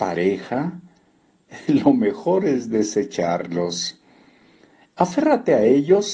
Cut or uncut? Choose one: uncut